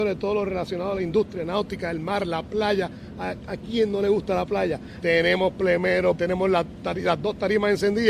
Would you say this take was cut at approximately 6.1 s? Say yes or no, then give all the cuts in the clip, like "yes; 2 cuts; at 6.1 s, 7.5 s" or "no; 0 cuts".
yes; 2 cuts; at 5.0 s, 6.1 s